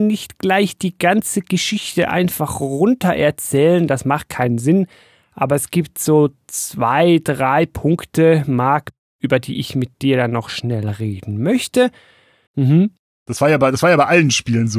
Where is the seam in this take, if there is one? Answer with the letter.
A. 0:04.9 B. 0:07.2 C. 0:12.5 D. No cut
C